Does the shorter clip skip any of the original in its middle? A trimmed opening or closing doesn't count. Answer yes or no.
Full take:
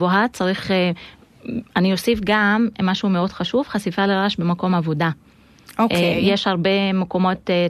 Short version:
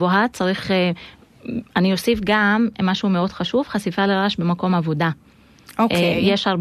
no